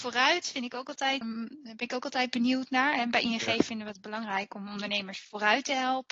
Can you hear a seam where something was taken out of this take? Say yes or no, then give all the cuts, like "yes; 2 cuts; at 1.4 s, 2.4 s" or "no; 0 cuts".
yes; 1 cut; at 1.2 s